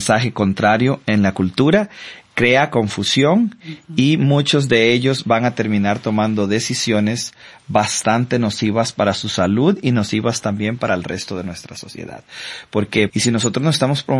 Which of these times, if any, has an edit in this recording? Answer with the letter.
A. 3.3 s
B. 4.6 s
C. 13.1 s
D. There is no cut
C